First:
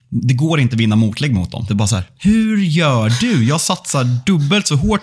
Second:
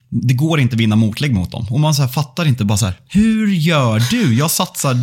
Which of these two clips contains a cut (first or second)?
first